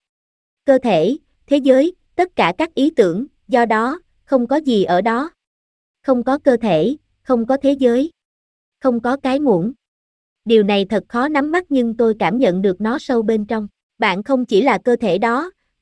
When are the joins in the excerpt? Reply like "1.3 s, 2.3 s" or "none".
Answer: 13.9 s